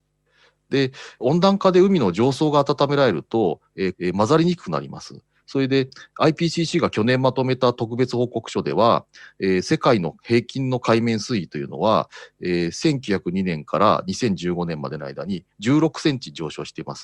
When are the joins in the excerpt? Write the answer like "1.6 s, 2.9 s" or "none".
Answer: 3.9 s, 5.4 s

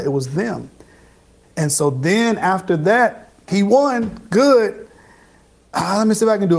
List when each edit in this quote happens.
1.4 s, 3.5 s

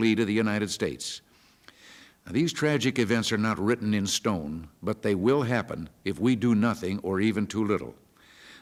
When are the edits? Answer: none

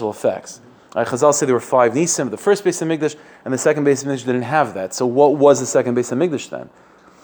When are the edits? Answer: none

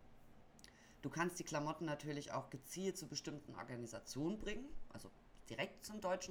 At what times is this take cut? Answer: none

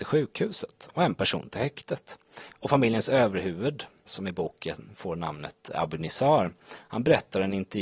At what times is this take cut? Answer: 2.5 s, 4.1 s

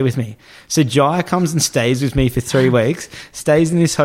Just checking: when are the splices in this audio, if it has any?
none

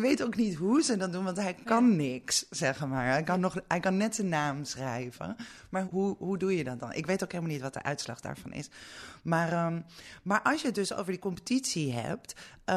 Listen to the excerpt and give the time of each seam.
5.8 s

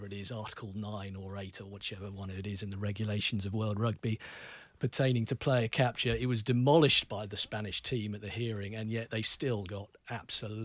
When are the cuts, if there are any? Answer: none

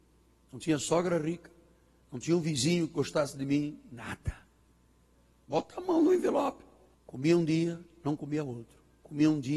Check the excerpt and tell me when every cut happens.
5.4 s, 6.9 s

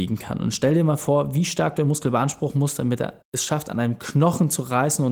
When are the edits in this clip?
none

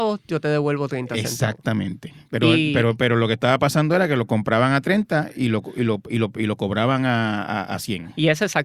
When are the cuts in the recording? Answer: none

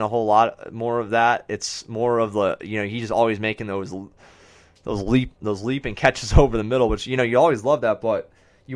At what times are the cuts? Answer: none

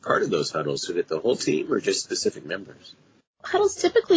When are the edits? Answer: none

